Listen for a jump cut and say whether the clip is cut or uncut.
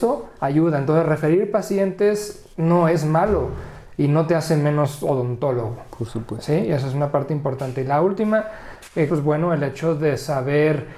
cut